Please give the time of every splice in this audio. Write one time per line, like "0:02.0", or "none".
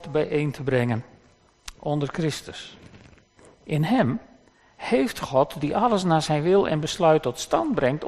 none